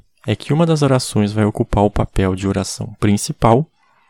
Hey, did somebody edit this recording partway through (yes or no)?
no